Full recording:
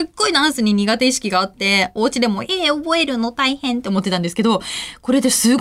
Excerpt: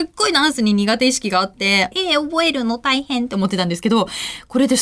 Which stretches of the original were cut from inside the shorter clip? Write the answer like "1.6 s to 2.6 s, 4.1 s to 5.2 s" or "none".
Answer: 1.9 s to 2.4 s